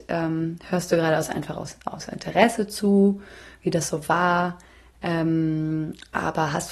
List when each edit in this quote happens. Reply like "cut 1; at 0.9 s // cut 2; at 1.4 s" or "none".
none